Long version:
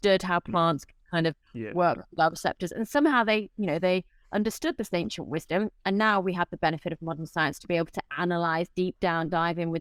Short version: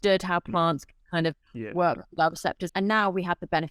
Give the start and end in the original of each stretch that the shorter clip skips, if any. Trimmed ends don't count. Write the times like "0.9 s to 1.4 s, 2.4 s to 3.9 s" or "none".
2.7 s to 5.8 s